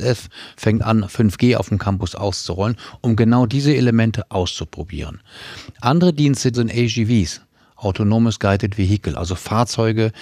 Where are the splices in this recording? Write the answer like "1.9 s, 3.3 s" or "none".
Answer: 6.5 s